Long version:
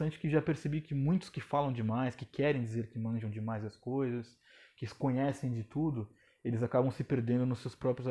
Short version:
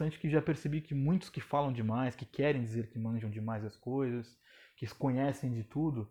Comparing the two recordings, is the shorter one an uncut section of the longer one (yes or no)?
yes